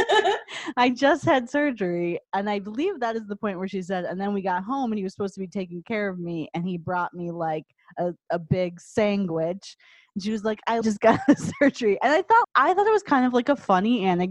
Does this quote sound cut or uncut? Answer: cut